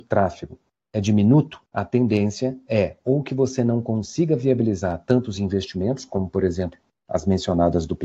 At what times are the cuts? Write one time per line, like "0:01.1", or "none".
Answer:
0:01.7